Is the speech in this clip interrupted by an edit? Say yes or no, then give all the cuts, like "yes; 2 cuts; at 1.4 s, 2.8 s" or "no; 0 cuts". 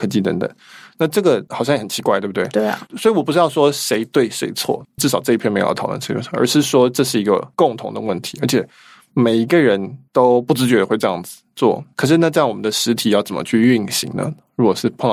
no; 0 cuts